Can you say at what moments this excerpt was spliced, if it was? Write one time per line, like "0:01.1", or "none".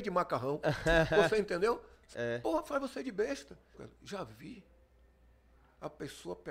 0:02.1
0:03.7